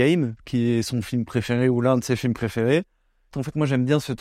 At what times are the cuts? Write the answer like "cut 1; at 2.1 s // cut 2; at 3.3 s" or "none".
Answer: cut 1; at 3.3 s